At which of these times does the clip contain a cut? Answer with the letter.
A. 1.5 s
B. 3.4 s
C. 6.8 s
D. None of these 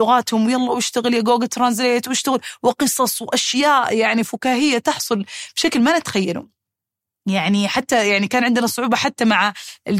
D